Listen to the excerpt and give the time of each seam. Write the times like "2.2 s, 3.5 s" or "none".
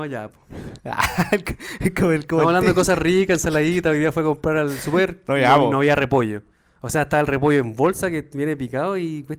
none